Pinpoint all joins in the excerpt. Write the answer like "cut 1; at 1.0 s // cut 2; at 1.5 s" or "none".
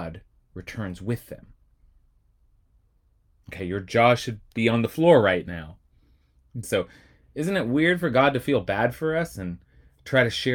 cut 1; at 6.6 s